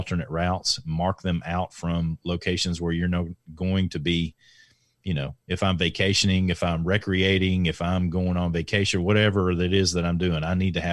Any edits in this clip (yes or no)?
no